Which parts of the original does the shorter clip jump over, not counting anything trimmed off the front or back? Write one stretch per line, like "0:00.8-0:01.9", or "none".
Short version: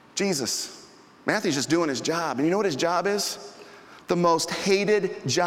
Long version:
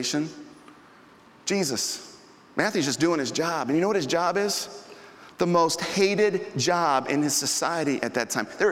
none